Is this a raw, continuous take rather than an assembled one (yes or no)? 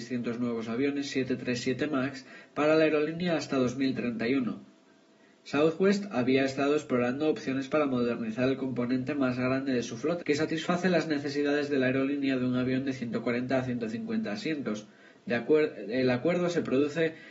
no